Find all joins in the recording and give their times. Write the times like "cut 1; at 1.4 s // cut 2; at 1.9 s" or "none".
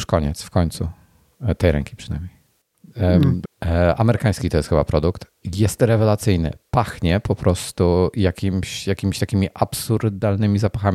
cut 1; at 3.4 s

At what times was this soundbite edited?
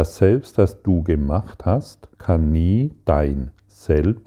cut 1; at 2.1 s

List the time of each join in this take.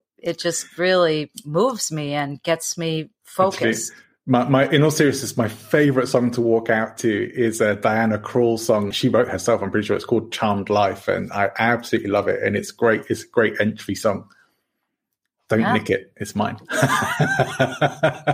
cut 1; at 8.9 s

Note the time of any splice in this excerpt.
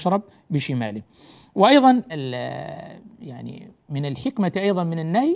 cut 1; at 2.1 s

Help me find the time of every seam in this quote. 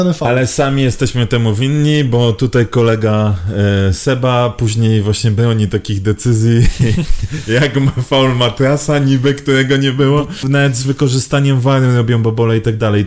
cut 1; at 7.1 s // cut 2; at 10.4 s

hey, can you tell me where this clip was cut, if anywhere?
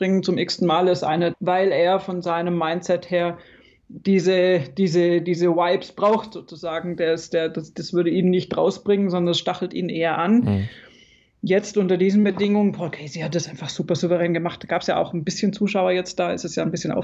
cut 1; at 1.3 s

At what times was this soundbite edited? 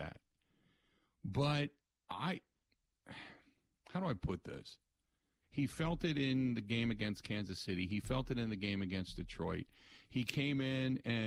cut 1; at 5.4 s

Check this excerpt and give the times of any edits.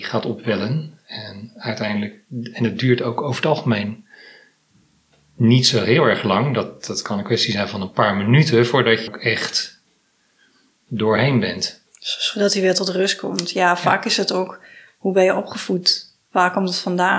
cut 1; at 9.1 s

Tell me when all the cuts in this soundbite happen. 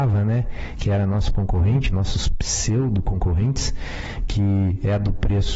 none

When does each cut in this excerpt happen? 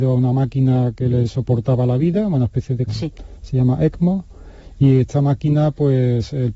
cut 1; at 2.9 s

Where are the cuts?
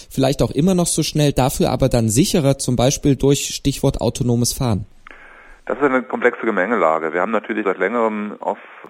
cut 1; at 7.6 s

